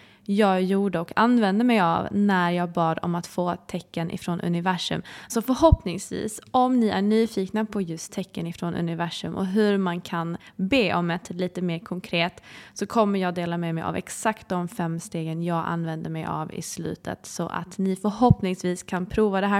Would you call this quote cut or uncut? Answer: cut